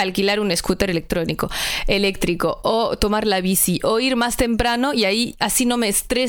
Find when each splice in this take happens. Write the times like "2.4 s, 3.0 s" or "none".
none